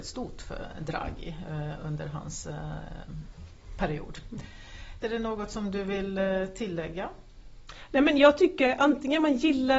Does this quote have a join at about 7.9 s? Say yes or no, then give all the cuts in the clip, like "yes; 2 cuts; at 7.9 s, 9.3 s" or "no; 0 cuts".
no; 1 cut; at 5.0 s